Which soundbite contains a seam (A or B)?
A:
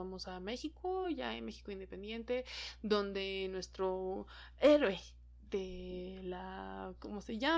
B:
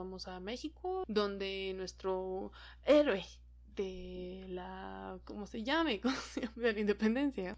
B